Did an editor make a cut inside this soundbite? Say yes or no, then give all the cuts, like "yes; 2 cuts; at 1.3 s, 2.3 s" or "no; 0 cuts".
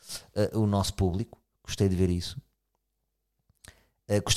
no; 0 cuts